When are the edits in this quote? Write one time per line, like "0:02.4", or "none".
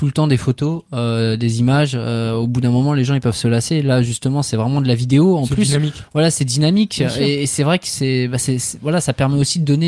none